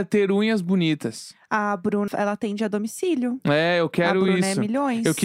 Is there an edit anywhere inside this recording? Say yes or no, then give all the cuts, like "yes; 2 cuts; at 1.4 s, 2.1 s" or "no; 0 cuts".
yes; 1 cut; at 2.1 s